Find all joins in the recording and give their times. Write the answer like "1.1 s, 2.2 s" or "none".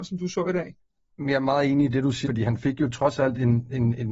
2.3 s